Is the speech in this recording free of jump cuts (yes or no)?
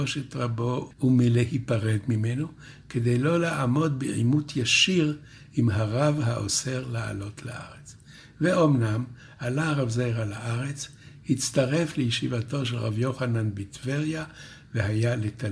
yes